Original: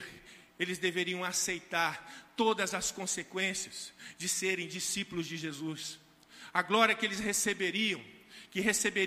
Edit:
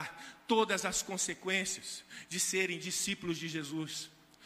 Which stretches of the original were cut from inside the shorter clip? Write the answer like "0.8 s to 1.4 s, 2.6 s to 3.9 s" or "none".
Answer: none